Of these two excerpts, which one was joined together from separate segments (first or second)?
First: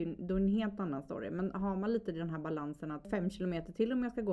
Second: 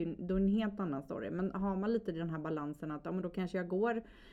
first